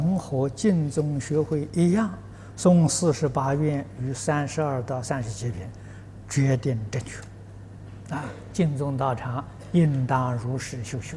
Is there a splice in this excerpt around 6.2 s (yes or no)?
no